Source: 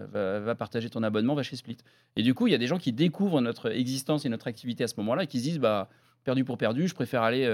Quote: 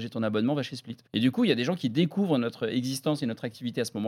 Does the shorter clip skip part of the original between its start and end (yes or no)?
yes